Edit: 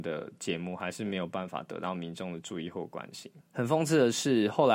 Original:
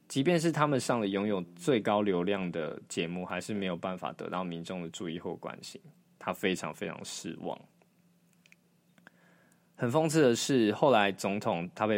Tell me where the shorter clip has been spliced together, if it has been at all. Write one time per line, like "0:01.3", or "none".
0:03.4